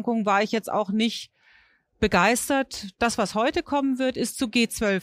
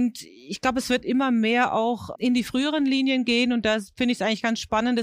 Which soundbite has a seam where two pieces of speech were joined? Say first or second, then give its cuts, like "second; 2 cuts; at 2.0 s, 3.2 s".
second; 1 cut; at 2.1 s